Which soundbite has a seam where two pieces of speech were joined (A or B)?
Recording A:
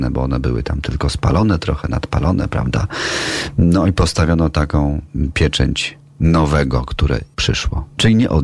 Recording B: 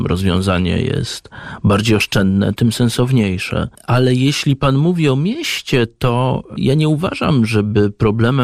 B